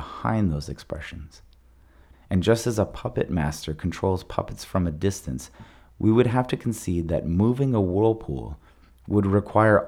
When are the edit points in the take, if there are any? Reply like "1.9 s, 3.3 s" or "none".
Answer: 2.1 s